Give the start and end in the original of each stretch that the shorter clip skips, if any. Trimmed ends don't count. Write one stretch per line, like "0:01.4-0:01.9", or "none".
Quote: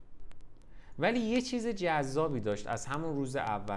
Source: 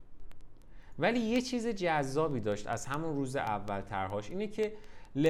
none